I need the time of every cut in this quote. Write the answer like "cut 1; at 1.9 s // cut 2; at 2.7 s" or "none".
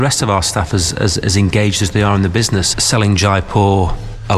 cut 1; at 2.7 s